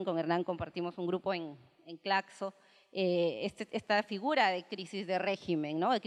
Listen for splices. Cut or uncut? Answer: uncut